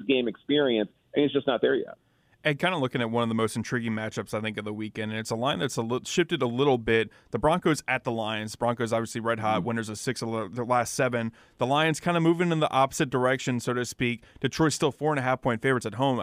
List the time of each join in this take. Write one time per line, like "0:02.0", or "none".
none